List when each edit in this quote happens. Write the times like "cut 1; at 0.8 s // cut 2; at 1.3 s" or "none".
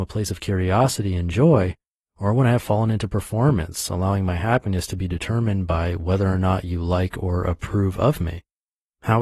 none

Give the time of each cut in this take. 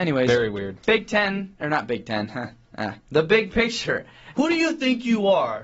cut 1; at 4.3 s

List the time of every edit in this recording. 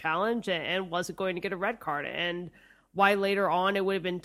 none

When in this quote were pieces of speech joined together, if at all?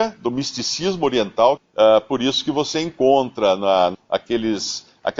cut 1; at 1.6 s // cut 2; at 3.9 s

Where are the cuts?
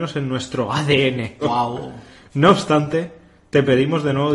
cut 1; at 1.4 s

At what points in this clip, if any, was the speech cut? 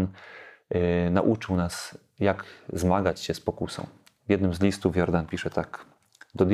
none

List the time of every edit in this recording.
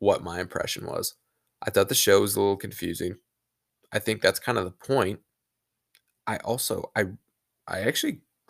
none

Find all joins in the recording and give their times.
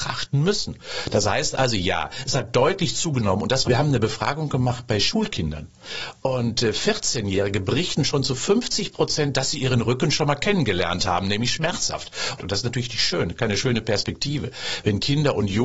cut 1; at 3.6 s // cut 2; at 12.4 s

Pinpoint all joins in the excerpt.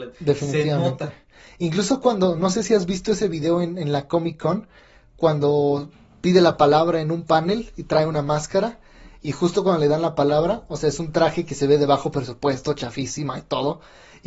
none

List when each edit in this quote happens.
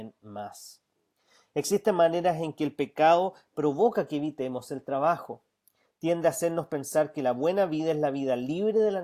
none

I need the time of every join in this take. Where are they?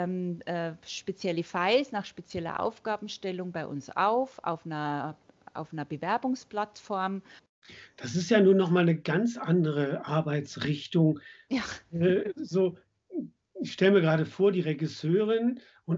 none

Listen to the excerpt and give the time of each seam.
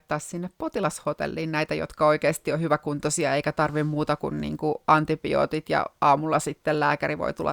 none

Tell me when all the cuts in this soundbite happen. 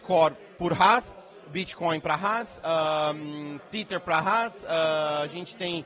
none

